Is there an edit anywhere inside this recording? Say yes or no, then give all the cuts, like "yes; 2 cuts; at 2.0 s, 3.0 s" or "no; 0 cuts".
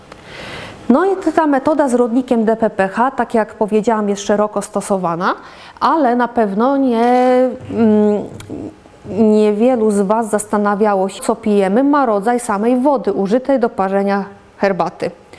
yes; 1 cut; at 11.2 s